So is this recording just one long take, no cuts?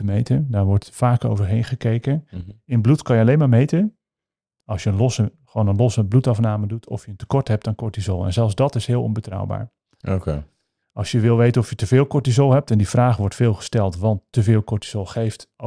yes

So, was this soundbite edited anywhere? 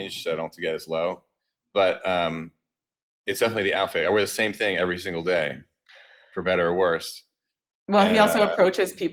no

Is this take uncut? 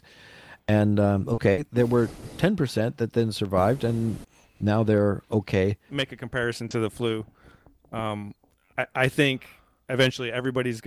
no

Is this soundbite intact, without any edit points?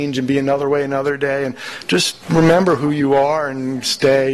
no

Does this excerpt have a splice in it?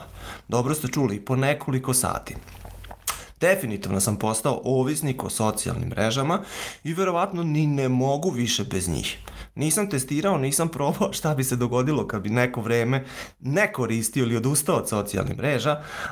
no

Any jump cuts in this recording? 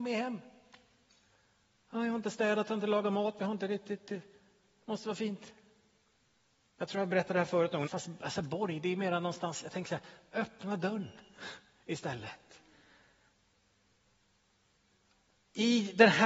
yes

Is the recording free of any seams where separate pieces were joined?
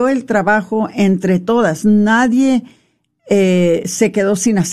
yes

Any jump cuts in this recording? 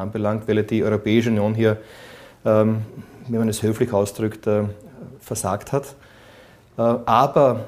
no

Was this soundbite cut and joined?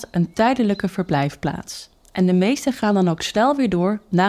no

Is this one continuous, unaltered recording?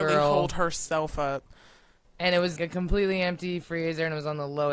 no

